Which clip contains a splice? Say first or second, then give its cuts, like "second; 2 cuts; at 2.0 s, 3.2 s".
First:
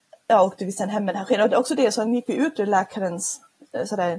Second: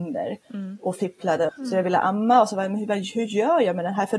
second; 1 cut; at 1.5 s